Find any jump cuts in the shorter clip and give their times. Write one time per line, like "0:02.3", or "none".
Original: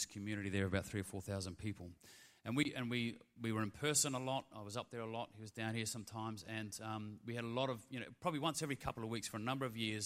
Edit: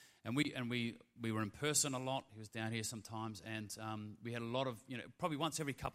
0:02.3